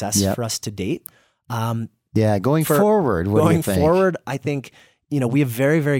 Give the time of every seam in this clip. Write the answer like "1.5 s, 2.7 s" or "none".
none